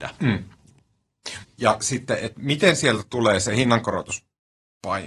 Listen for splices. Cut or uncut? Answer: cut